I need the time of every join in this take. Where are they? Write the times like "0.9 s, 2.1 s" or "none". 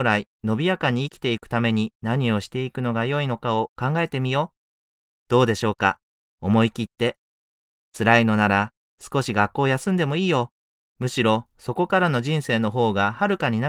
5.2 s, 10.9 s